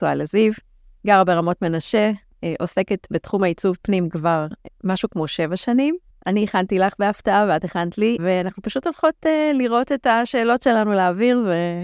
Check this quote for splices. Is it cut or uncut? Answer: cut